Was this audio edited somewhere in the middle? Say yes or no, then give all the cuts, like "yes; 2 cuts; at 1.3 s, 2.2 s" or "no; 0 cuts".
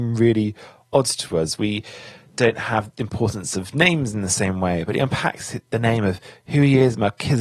no; 0 cuts